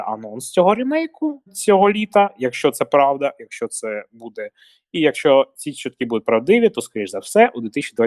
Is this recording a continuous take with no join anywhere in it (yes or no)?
no